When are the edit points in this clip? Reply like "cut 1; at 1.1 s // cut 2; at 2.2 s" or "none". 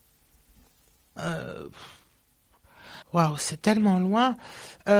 cut 1; at 3.0 s